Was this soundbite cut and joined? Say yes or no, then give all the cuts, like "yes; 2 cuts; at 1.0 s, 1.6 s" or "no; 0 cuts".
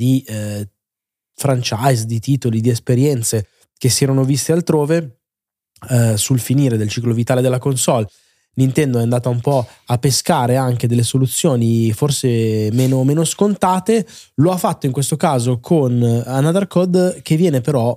no; 0 cuts